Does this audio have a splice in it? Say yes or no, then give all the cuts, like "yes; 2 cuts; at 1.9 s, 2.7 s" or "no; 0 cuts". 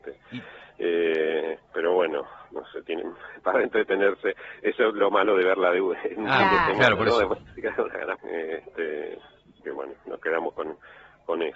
yes; 2 cuts; at 8.2 s, 9.6 s